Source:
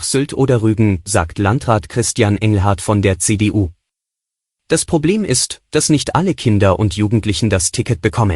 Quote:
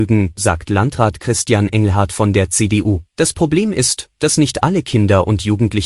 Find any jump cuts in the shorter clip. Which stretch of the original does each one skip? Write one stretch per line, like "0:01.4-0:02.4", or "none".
0:03.8-0:04.6